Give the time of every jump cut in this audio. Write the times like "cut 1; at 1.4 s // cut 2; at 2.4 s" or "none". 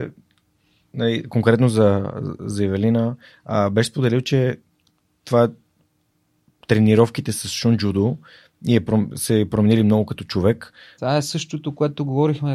cut 1; at 11.0 s